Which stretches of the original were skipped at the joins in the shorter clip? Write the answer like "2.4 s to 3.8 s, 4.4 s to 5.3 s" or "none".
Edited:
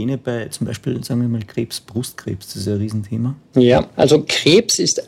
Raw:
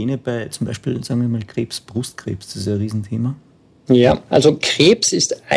3.4 s to 3.8 s